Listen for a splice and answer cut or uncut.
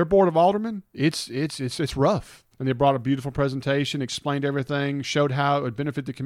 cut